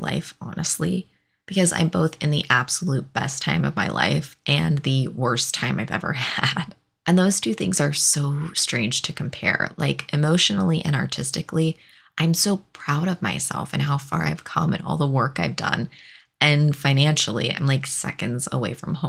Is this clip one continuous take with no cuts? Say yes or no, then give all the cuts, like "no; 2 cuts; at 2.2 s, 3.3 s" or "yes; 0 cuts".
yes; 0 cuts